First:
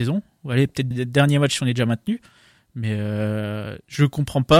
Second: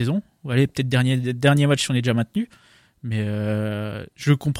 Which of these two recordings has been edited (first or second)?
first